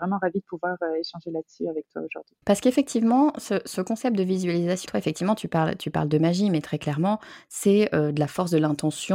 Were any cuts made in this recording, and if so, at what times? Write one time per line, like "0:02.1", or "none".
0:02.4
0:04.9